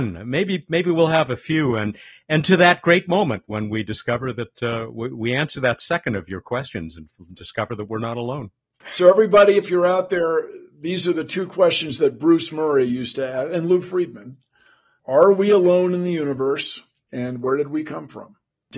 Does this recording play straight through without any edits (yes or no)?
yes